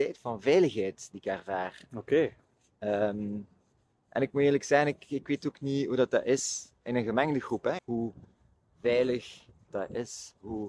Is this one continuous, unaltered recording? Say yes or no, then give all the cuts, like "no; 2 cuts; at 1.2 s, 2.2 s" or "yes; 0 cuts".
no; 2 cuts; at 7.8 s, 9.7 s